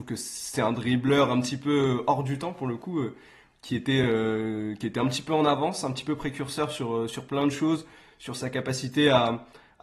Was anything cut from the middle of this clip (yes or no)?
no